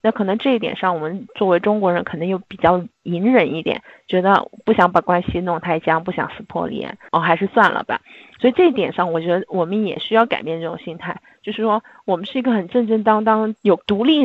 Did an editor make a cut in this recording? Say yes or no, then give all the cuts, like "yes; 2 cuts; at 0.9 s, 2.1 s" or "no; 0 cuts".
no; 0 cuts